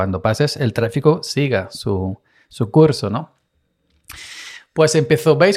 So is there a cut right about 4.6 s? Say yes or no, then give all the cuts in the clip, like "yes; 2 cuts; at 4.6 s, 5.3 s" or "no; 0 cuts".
no; 0 cuts